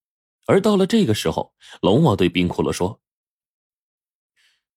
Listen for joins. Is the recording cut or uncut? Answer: uncut